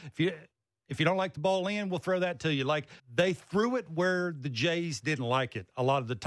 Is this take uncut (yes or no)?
no